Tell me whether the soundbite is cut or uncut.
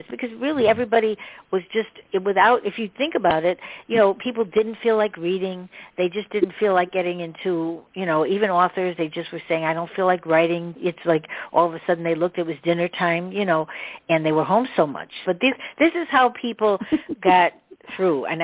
cut